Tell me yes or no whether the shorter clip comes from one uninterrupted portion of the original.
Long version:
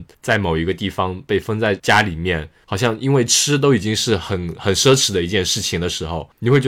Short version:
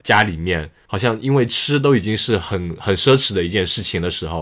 yes